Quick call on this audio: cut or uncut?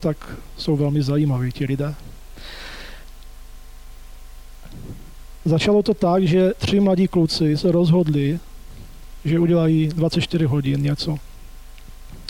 uncut